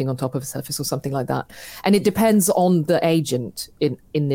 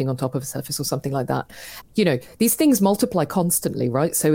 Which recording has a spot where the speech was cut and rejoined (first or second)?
second